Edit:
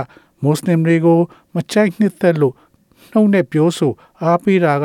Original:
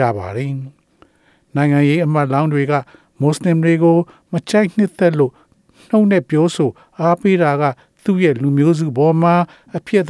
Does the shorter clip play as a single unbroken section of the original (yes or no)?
yes